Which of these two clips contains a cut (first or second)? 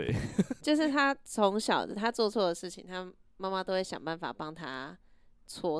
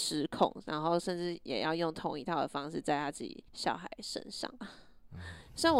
second